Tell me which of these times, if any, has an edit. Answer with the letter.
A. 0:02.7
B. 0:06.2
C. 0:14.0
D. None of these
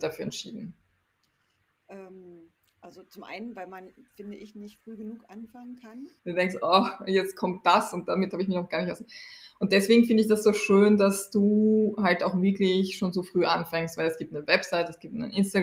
B